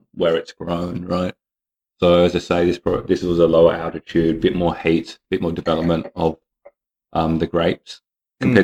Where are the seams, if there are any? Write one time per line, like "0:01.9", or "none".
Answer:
none